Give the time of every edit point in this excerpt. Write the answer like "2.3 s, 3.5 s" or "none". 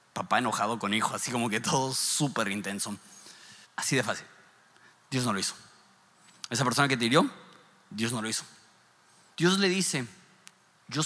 3.6 s, 9.3 s